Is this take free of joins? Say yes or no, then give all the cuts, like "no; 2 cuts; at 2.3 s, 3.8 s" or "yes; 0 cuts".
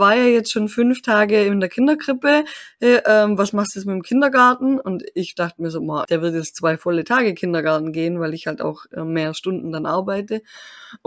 no; 1 cut; at 6.0 s